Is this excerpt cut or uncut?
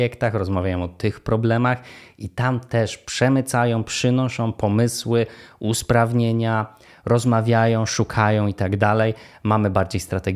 uncut